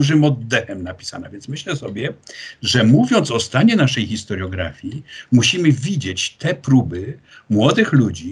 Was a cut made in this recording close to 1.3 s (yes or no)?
no